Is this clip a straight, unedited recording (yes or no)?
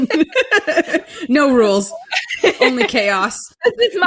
yes